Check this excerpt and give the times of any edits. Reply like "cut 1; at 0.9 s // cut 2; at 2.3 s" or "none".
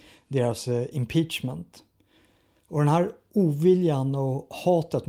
cut 1; at 2.6 s